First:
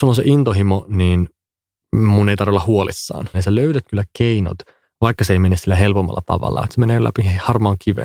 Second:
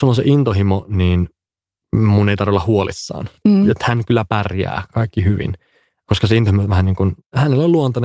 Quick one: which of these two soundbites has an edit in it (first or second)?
first